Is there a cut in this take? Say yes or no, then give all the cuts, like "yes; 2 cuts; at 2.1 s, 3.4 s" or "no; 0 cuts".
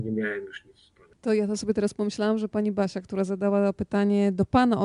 yes; 1 cut; at 1.1 s